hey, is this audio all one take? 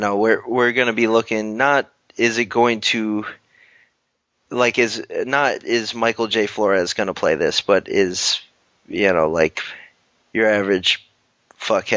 yes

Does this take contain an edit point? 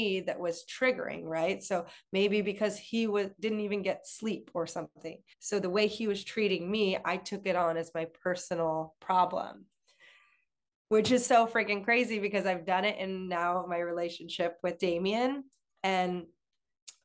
yes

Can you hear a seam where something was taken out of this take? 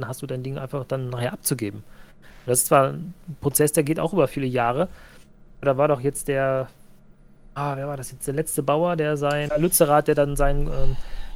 yes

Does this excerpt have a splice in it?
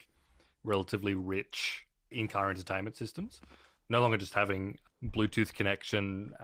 no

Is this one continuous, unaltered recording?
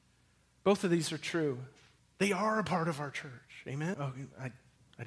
no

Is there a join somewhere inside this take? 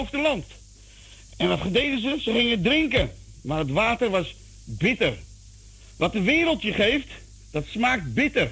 yes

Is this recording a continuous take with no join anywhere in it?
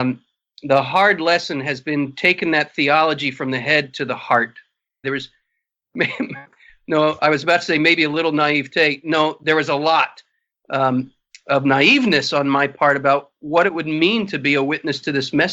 no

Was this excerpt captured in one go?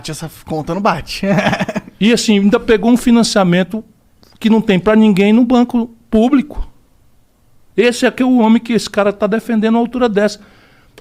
yes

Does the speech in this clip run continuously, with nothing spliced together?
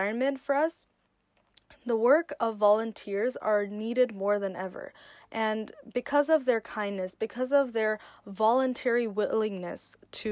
yes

